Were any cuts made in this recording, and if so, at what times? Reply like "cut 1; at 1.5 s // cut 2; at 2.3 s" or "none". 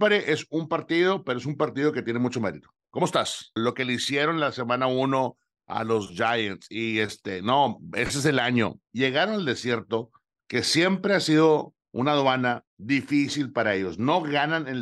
cut 1; at 3.6 s // cut 2; at 12.7 s